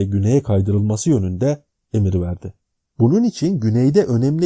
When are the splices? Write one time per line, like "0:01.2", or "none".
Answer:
0:02.9